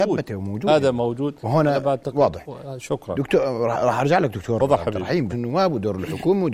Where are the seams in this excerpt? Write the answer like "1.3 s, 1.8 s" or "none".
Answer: 5.3 s